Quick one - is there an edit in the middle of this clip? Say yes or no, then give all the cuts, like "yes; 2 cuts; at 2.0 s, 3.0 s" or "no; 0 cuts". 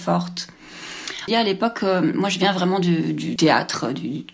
yes; 2 cuts; at 1.3 s, 3.4 s